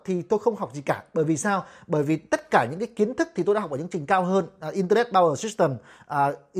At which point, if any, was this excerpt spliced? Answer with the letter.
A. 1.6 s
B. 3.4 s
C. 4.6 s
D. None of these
D